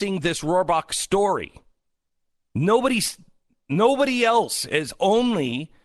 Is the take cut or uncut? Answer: uncut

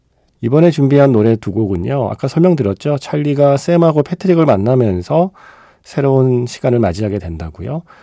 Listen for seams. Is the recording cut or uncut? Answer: uncut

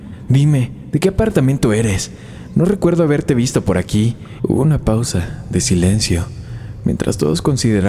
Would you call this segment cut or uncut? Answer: cut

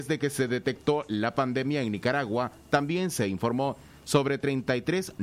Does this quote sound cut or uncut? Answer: uncut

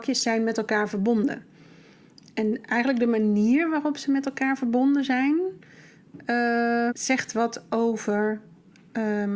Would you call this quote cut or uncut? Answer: cut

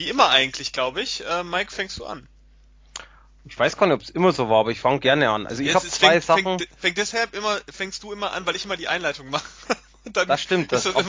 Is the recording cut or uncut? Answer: uncut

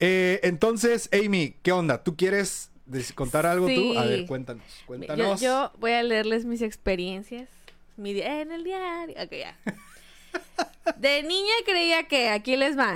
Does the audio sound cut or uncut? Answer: uncut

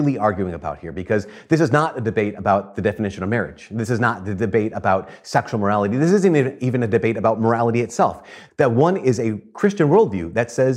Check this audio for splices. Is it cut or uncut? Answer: cut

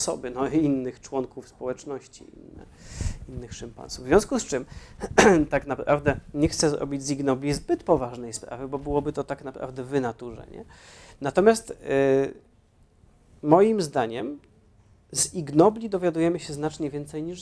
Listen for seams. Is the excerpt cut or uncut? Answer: uncut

